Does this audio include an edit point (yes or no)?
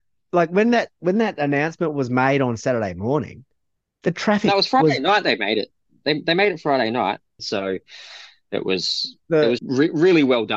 yes